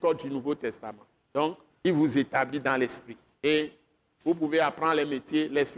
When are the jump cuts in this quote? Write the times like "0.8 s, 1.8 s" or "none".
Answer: 1.7 s, 3.3 s